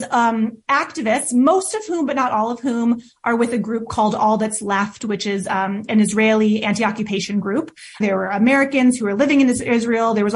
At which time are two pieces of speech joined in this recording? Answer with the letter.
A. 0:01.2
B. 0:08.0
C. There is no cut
B